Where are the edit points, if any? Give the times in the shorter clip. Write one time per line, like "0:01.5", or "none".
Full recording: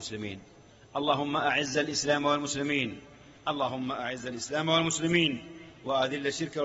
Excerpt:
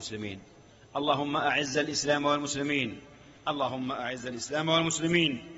none